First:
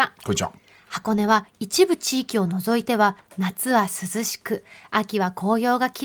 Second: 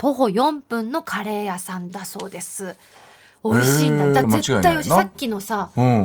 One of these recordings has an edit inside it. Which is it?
second; 1 cut; at 4.2 s

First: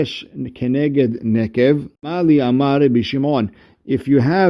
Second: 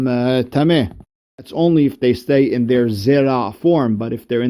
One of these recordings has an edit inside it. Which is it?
first; 1 cut; at 1.9 s

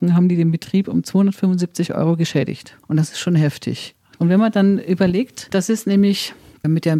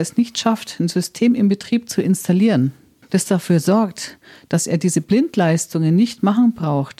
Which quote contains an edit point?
first; 1 cut; at 4.2 s

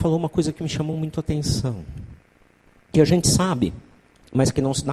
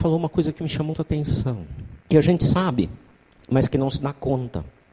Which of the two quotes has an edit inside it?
second; 2 cuts; at 0.9 s, 2.0 s

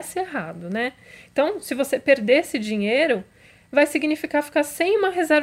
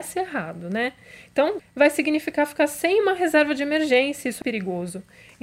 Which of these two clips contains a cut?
second; 2 cuts; at 1.6 s, 4.4 s

